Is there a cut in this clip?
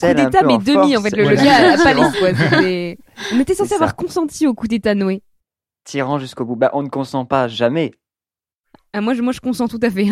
yes; 1 cut; at 2.1 s

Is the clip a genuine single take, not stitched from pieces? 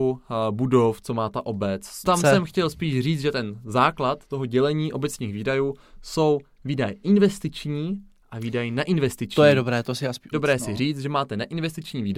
no; 2 cuts; at 2.0 s, 10.3 s

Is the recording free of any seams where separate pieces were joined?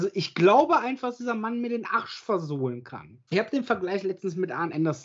no; 1 cut; at 3.3 s

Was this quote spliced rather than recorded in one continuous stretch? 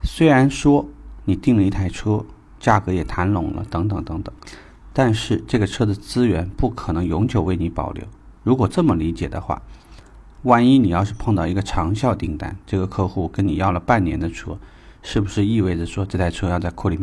no; 0 cuts

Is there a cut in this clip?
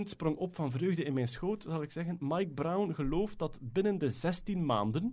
no; 0 cuts

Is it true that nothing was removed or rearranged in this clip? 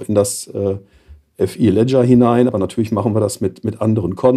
yes; 0 cuts

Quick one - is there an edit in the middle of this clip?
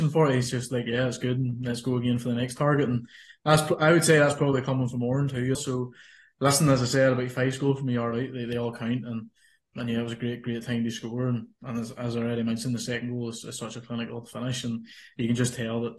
yes; 1 cut; at 5.5 s

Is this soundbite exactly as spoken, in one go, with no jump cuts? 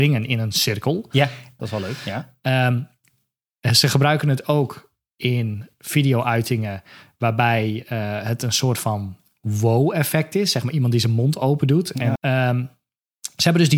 no; 2 cuts; at 1.6 s, 12.2 s

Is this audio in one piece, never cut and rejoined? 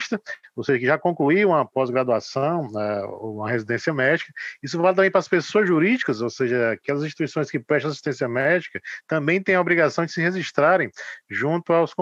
yes; 0 cuts

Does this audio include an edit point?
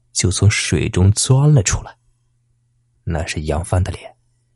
yes; 1 cut; at 2.9 s

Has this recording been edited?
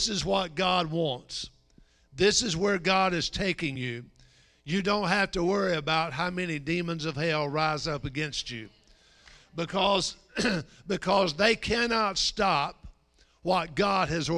no; 0 cuts

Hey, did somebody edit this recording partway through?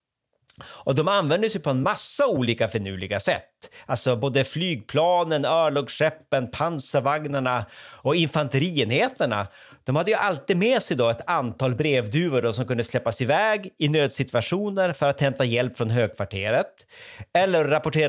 no; 0 cuts

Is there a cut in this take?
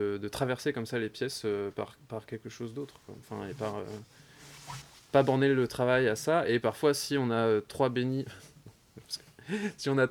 no; 0 cuts

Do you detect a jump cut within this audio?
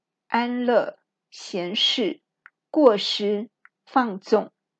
yes; 1 cut; at 3.8 s

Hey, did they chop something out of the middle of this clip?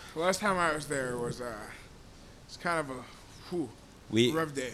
no; 0 cuts

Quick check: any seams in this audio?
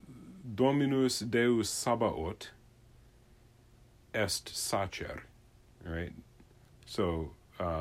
no; 0 cuts

